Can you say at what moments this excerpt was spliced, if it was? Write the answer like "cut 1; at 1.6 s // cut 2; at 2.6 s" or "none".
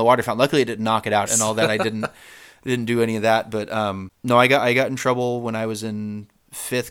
cut 1; at 1.3 s